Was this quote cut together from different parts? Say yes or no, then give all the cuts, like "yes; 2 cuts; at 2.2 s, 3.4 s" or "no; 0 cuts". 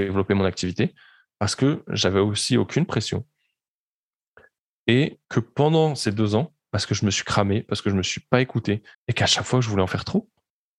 yes; 3 cuts; at 5.2 s, 6.6 s, 8.9 s